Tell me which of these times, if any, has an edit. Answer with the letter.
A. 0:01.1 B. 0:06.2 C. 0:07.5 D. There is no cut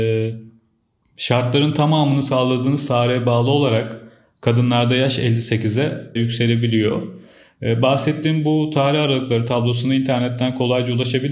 B